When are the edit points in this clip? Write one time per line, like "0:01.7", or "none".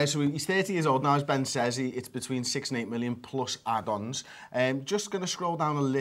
none